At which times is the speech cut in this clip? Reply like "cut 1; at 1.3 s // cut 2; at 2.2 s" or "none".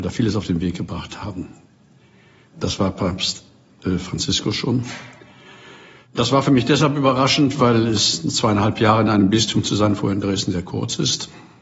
cut 1; at 2.5 s